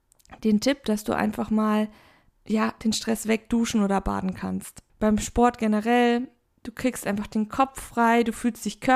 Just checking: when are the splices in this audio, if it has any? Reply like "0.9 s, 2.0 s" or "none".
4.9 s